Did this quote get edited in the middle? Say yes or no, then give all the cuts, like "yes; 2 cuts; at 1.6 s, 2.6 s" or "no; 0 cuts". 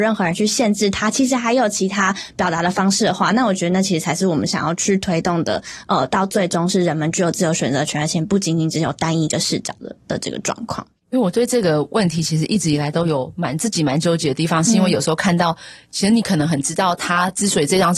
no; 0 cuts